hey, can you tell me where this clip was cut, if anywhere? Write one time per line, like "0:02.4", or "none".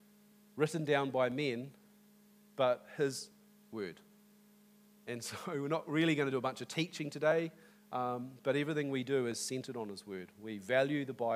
none